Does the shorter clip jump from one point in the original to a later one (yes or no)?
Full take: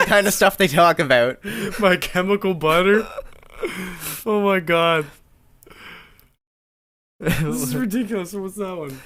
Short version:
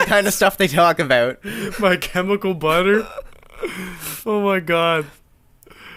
no